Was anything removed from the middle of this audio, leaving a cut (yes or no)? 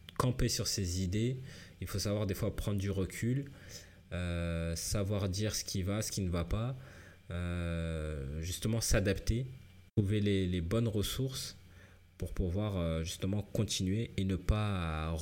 yes